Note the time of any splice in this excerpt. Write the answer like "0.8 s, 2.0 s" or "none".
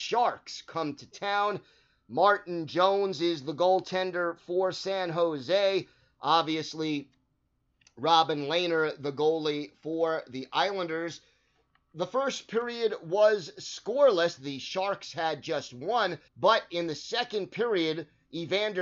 14.4 s, 16.3 s